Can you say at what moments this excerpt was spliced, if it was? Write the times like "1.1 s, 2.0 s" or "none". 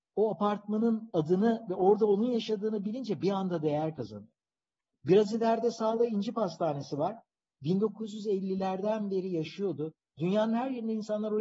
10.2 s